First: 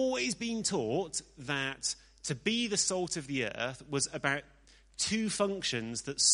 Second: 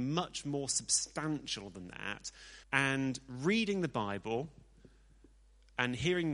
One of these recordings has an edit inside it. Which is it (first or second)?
second